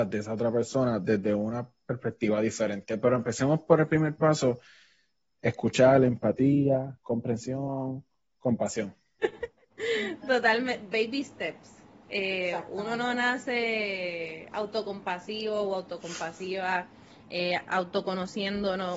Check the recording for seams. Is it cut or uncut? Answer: uncut